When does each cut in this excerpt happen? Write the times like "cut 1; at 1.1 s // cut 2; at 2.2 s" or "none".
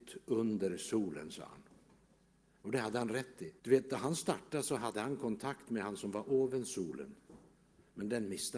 cut 1; at 3.6 s